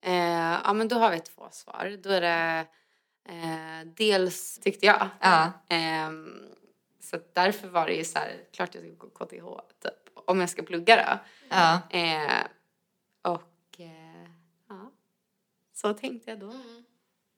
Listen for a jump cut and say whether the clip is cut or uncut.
cut